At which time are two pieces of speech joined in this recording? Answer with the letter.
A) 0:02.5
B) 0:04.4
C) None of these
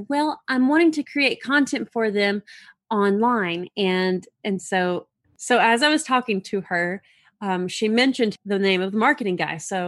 C